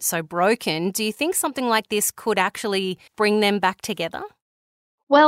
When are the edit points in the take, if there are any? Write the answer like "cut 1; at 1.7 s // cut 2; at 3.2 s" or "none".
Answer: cut 1; at 3.1 s